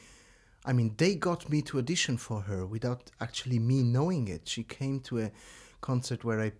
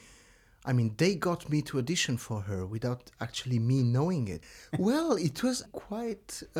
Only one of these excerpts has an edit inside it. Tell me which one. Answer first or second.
second